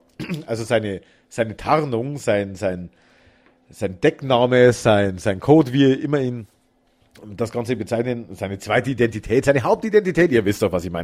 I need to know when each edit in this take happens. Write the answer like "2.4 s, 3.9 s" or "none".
none